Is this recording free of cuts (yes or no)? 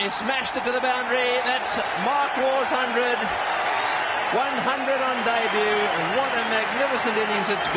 yes